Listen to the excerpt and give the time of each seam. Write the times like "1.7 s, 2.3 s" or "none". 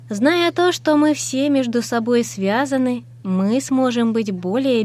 3.2 s